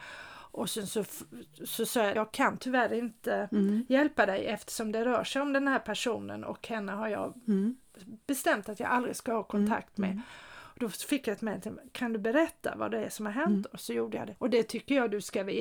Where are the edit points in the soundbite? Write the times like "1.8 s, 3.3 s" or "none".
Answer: 2.2 s, 14.4 s